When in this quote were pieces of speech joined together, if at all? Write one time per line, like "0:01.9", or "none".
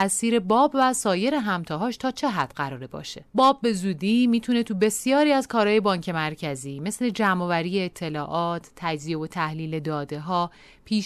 0:03.3